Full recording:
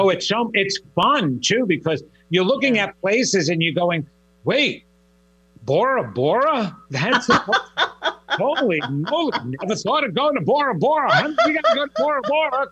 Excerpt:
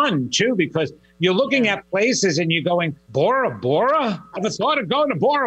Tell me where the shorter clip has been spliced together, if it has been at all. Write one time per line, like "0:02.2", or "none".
0:03.1
0:04.3